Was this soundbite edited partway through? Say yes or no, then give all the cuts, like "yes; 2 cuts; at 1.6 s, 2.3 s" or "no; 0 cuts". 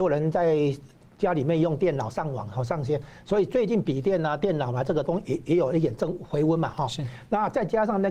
no; 0 cuts